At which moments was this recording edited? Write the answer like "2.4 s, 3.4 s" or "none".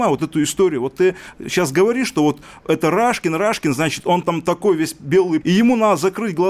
4.2 s, 5.4 s